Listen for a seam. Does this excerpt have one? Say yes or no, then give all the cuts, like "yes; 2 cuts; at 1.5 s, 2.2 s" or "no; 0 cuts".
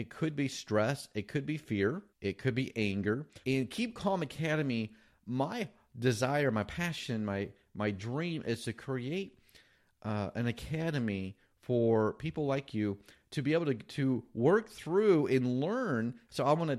yes; 2 cuts; at 2.1 s, 3.4 s